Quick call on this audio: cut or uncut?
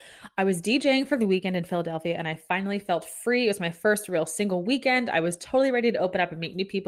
uncut